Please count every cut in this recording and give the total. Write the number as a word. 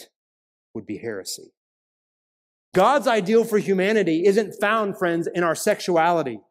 one